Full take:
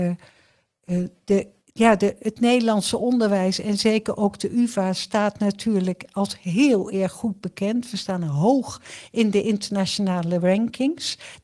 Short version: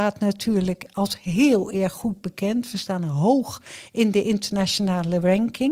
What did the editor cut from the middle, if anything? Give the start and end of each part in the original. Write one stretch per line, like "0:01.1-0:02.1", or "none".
none